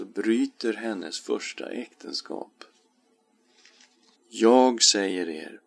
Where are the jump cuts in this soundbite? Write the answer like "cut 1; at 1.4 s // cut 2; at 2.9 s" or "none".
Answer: cut 1; at 4.1 s